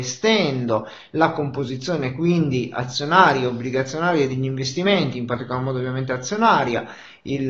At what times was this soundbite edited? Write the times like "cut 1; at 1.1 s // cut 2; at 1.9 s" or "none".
none